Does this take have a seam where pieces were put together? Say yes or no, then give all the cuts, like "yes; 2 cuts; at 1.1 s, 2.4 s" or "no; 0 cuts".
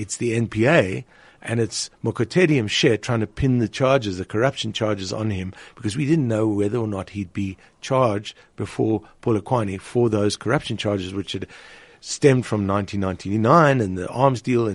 no; 0 cuts